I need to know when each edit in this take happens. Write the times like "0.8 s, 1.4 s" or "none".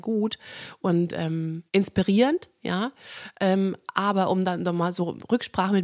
1.7 s

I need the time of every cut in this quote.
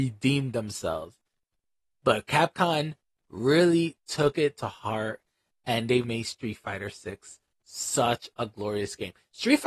1.9 s, 6.0 s

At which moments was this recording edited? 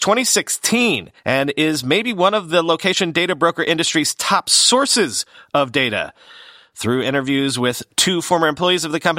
1.2 s, 6.7 s

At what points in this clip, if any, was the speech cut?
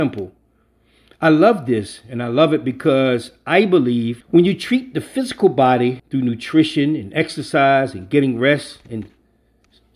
4.2 s, 6.0 s

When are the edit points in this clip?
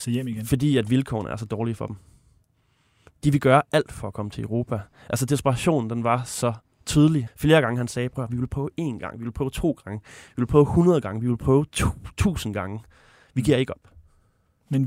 7.3 s

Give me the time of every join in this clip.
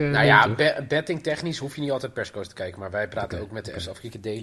none

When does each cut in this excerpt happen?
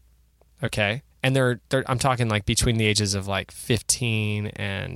1.1 s

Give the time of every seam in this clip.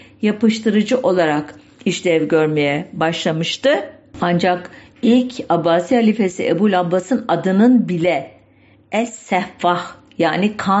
none

